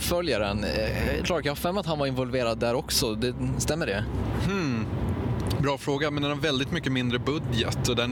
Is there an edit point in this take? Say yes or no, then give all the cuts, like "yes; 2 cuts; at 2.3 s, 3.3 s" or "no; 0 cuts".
yes; 1 cut; at 1.2 s